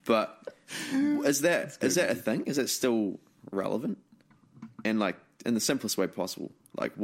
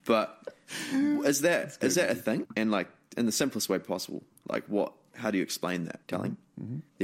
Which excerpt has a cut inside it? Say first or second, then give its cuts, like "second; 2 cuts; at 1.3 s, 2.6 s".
second; 2 cuts; at 2.4 s, 6.0 s